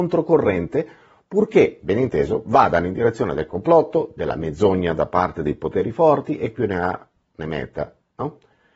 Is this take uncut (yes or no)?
yes